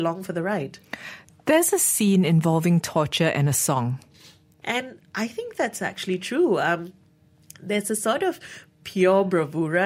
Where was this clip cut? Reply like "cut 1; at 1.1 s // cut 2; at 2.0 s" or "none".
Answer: cut 1; at 4.6 s